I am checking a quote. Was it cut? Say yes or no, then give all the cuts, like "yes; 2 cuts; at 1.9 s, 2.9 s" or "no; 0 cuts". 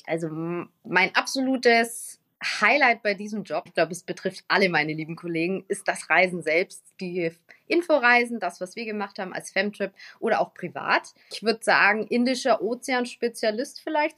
yes; 2 cuts; at 3.7 s, 11.2 s